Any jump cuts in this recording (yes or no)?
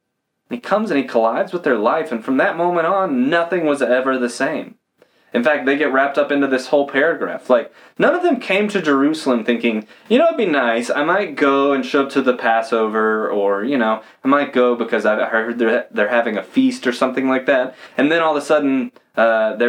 no